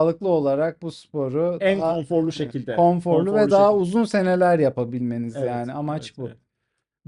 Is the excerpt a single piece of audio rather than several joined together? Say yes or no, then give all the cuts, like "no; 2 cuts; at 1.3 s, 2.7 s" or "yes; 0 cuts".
yes; 0 cuts